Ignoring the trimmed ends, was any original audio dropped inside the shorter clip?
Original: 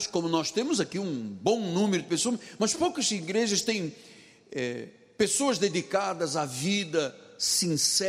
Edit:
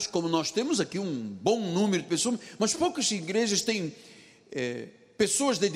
no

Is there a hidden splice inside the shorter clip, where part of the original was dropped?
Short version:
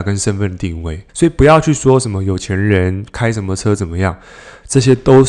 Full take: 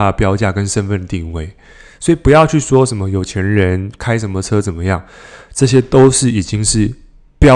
yes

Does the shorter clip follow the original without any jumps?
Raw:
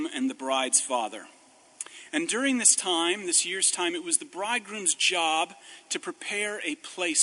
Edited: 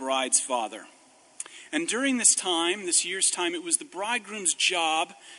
yes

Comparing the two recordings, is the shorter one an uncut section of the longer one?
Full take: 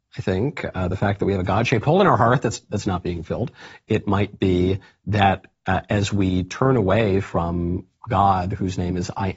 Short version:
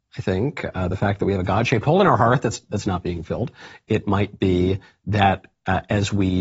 yes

